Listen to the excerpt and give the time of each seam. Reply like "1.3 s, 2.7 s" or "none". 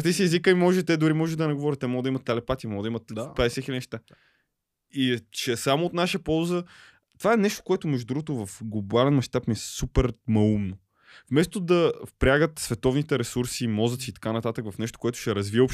none

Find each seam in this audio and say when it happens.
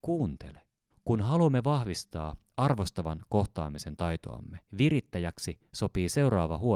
0.9 s, 4.7 s

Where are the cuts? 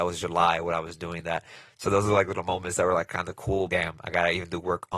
3.7 s

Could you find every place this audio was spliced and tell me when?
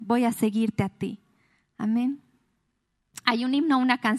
none

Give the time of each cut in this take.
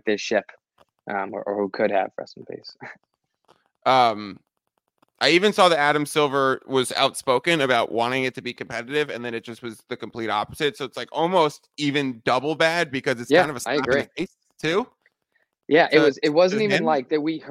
none

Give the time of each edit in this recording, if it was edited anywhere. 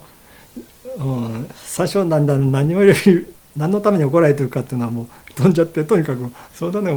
none

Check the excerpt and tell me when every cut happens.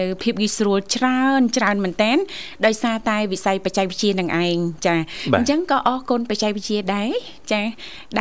none

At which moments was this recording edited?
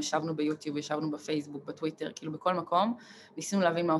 none

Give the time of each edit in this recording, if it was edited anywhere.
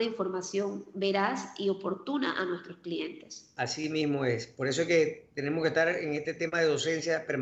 none

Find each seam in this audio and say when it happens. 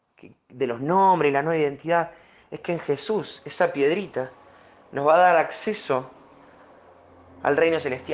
none

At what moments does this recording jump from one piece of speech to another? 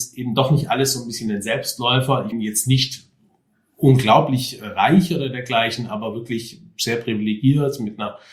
2.3 s

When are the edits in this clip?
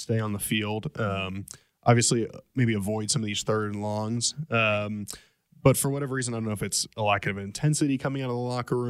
none

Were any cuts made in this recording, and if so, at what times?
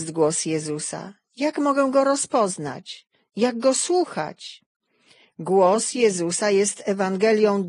none

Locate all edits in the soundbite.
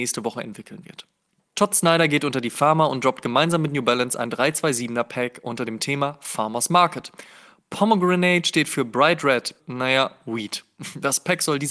9.6 s

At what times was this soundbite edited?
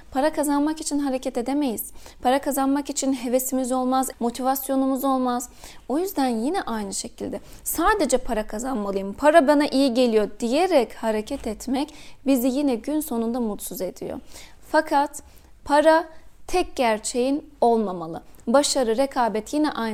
4.1 s, 14.6 s

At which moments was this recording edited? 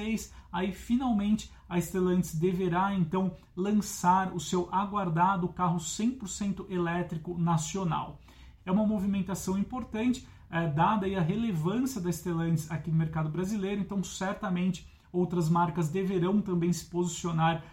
8.6 s

